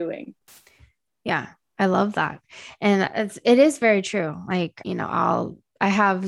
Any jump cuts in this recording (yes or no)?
no